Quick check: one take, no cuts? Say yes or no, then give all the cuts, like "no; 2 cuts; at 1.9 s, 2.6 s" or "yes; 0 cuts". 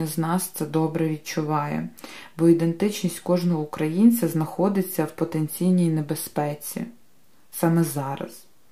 yes; 0 cuts